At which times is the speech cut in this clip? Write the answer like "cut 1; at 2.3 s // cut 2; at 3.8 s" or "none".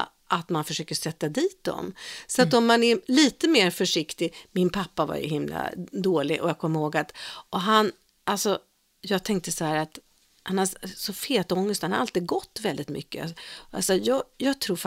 none

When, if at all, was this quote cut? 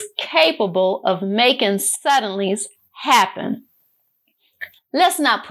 none

